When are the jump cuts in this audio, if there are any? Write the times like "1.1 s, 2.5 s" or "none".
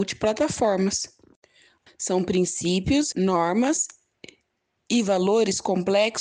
1.9 s, 3.1 s

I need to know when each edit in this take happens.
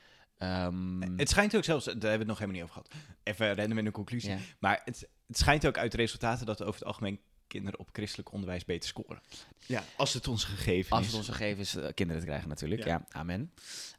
3.1 s, 9.5 s

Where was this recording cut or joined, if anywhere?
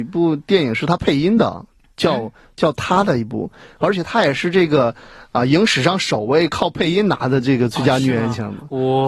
none

